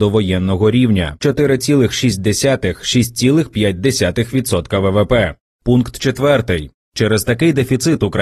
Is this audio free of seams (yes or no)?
yes